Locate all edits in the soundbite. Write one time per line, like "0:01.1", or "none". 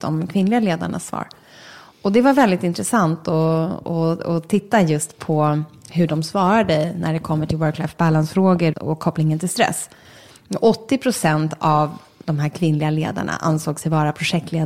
0:08.7